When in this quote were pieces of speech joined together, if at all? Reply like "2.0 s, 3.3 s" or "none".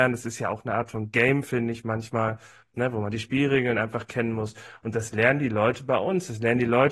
none